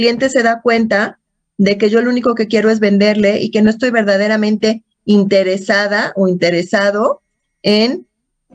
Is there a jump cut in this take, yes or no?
no